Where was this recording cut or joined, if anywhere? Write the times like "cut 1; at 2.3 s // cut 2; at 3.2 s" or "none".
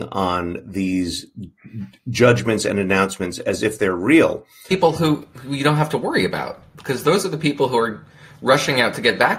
cut 1; at 4.7 s